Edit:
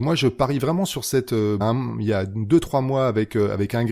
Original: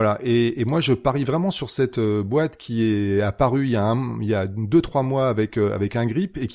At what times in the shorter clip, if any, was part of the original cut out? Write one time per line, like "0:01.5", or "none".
0:01.6